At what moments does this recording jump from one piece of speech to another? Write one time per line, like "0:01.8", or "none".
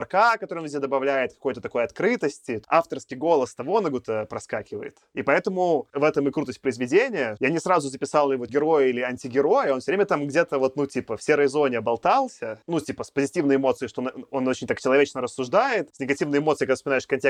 none

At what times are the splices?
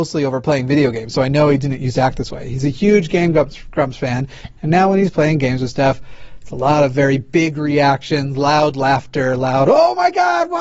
none

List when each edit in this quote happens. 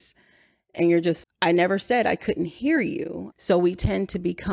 0:01.2
0:03.3

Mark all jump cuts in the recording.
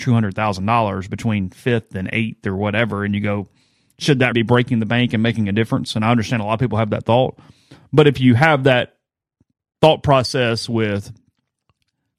0:04.3

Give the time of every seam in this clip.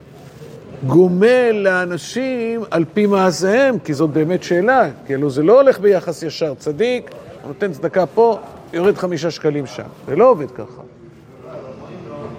0:07.4
0:08.7

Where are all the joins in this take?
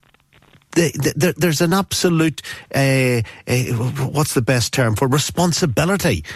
none

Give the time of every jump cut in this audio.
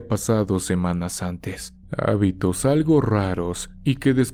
0:01.8

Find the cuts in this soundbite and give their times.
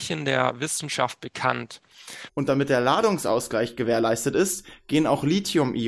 0:02.3

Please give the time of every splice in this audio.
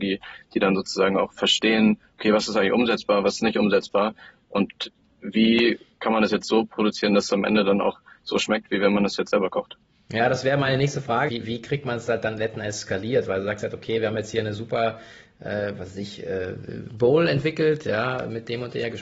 0:11.3

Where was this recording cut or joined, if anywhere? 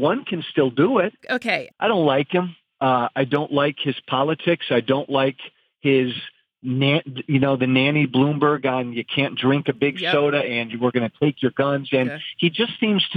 0:01.7

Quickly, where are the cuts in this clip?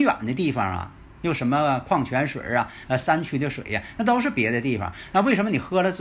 none

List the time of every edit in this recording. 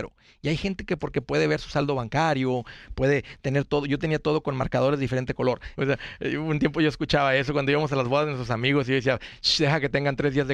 0:05.7

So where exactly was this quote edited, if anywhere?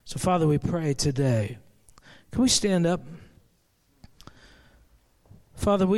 none

